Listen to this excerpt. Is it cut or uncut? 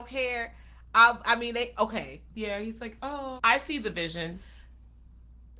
cut